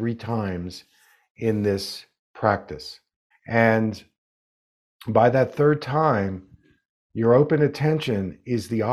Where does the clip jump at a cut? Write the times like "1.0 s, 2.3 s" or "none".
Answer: 3.3 s